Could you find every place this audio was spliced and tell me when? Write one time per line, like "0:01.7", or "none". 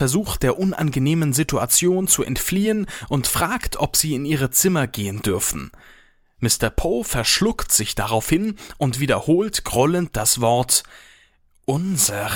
none